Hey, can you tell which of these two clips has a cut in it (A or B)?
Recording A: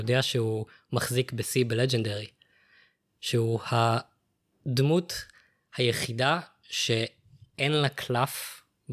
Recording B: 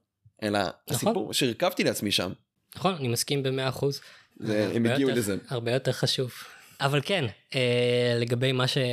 B